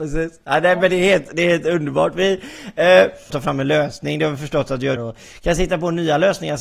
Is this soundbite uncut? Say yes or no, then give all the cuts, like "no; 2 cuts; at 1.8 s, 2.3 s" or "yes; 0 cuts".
no; 2 cuts; at 3.3 s, 5.0 s